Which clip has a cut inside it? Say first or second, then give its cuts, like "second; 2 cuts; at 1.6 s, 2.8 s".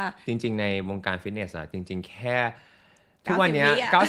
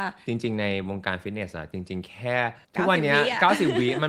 second; 1 cut; at 2.6 s